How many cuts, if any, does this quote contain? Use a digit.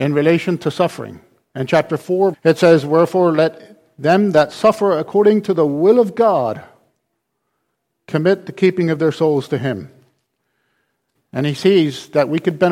2